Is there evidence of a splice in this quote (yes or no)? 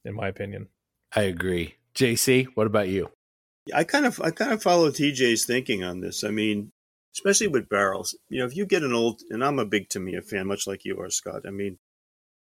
no